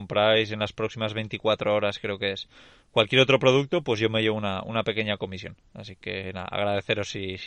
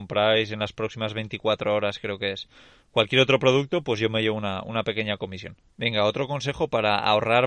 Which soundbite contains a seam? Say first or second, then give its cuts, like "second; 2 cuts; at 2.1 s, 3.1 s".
second; 1 cut; at 5.7 s